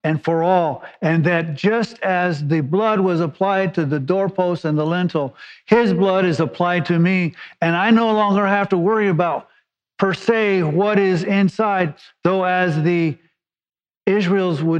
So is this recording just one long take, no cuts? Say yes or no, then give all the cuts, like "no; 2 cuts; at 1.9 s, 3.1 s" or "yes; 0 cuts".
yes; 0 cuts